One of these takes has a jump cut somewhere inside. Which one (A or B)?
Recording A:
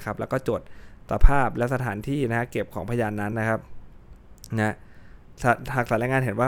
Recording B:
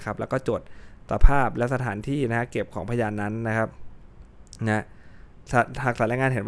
A